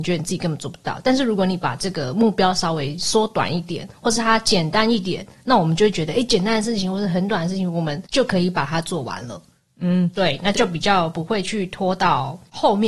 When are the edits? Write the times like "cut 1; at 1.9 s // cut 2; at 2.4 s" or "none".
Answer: cut 1; at 10.5 s